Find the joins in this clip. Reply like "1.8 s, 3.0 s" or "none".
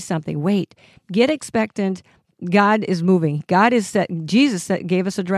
none